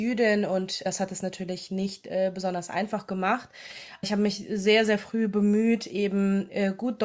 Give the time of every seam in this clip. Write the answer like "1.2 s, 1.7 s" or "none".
none